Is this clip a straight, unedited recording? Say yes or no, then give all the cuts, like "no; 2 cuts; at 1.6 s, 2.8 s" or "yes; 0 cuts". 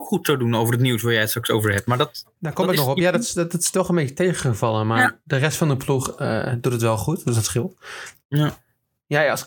yes; 0 cuts